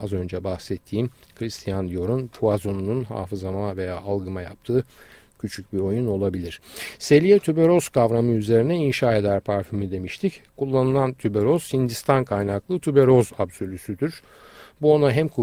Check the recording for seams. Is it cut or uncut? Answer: uncut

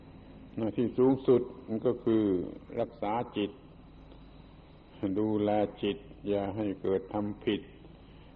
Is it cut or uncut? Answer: uncut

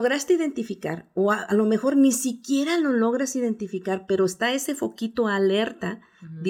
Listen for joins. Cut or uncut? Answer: uncut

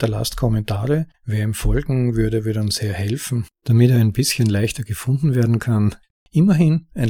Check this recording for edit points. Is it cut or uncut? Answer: cut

